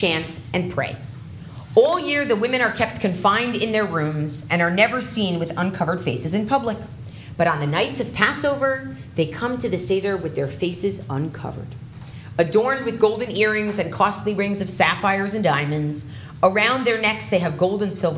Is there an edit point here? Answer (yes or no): no